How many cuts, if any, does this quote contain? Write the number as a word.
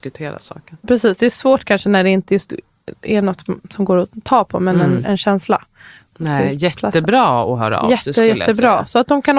zero